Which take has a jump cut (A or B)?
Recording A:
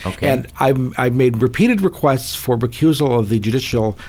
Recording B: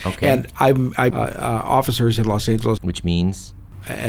B